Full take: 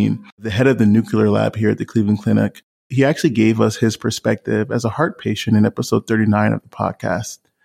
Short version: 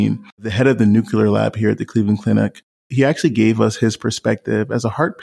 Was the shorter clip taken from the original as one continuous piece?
yes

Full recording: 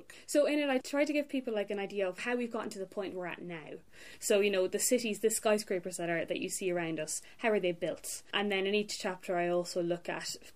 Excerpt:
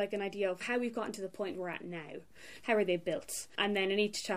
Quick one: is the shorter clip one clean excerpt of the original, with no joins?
no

